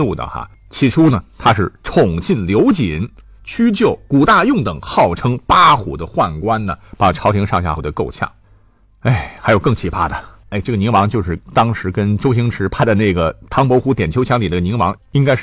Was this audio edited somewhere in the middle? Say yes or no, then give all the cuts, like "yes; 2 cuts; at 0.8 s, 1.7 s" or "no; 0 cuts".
yes; 2 cuts; at 7.8 s, 10.4 s